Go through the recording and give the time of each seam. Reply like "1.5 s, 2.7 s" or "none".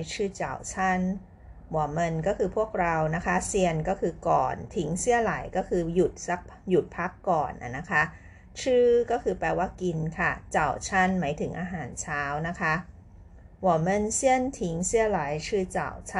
none